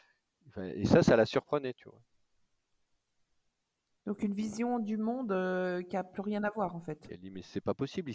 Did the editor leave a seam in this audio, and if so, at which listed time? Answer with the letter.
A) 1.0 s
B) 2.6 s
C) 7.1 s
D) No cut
C